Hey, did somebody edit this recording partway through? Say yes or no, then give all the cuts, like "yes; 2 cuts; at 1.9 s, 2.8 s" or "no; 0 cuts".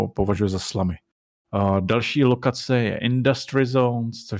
yes; 1 cut; at 1.4 s